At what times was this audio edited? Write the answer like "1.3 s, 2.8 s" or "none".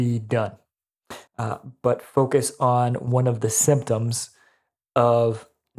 1.3 s